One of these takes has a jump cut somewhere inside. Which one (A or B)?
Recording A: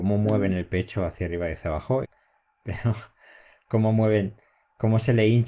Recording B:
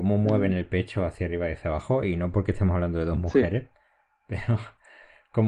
A